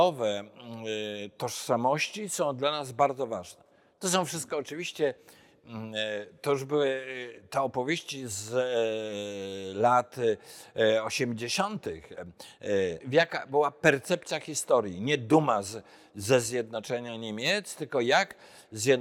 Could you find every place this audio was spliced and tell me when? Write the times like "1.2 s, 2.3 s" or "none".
4.0 s, 13.0 s

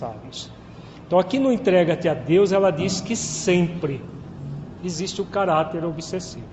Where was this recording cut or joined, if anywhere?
4.8 s

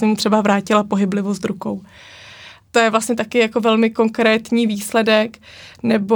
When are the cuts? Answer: 2.7 s

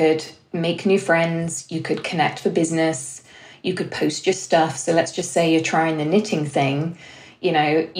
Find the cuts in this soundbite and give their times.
none

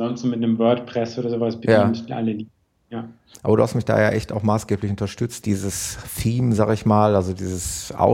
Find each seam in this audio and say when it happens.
3.3 s, 5.4 s

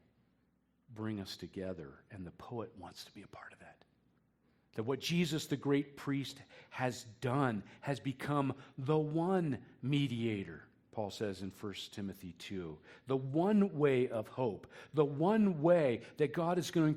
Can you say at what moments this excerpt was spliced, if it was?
none

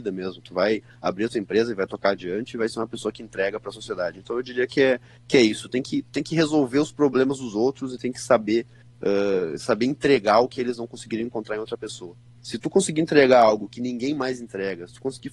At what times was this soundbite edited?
none

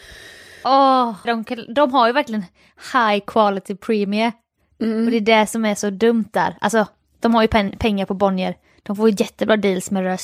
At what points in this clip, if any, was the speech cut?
1.3 s

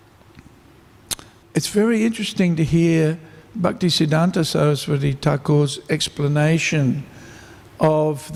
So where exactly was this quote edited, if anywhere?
1.4 s

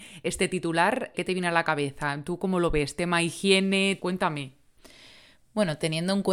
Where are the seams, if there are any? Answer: 1.1 s, 4.0 s

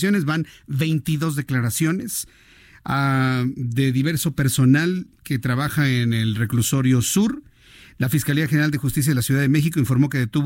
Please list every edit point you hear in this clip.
none

